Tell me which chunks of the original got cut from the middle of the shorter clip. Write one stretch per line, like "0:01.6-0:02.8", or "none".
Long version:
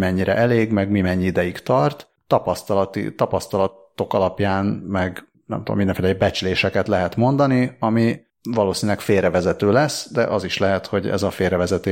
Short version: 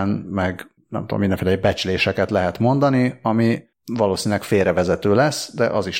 none